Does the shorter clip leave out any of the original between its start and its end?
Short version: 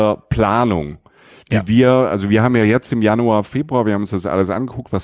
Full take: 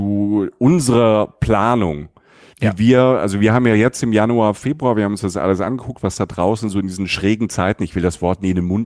no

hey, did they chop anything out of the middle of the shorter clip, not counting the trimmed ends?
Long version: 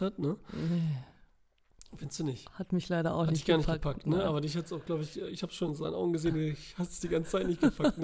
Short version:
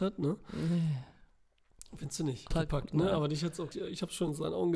yes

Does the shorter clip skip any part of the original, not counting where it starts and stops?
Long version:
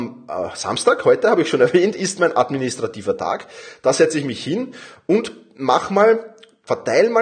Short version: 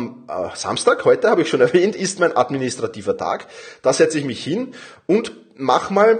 no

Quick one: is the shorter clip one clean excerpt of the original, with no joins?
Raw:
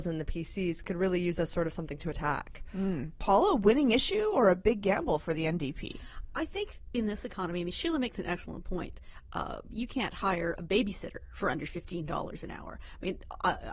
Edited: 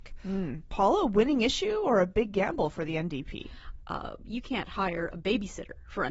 no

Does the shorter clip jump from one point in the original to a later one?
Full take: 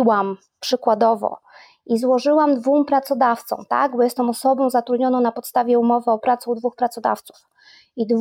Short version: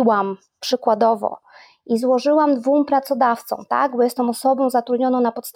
no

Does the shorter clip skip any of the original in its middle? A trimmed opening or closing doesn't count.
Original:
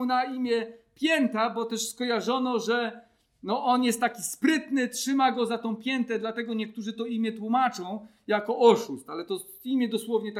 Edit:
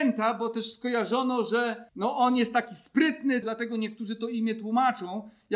yes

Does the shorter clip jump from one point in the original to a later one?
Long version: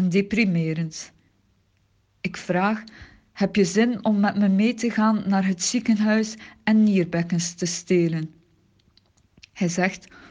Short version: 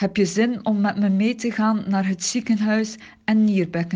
no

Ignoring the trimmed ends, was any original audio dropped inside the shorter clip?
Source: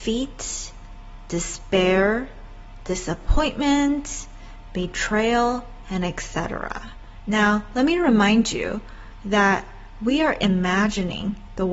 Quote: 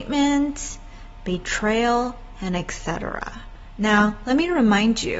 no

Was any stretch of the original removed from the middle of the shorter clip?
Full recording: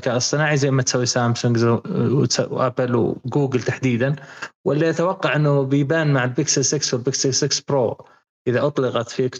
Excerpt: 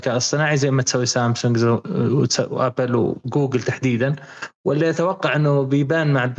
no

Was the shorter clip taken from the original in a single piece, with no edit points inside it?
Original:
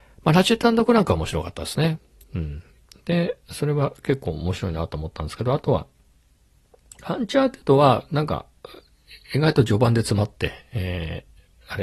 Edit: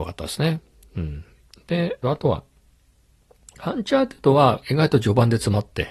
no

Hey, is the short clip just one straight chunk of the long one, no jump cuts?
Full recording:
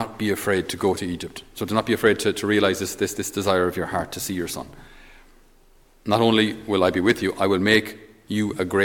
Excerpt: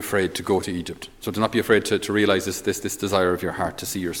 yes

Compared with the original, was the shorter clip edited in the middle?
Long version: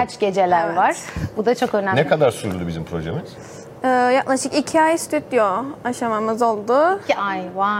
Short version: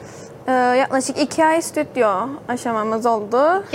no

